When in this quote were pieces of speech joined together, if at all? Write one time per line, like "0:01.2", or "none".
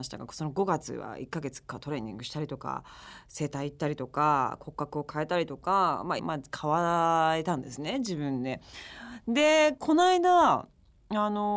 0:06.2